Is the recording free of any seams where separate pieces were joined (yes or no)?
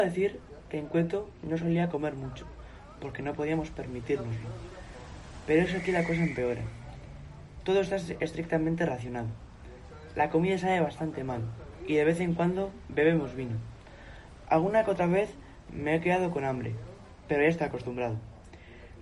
yes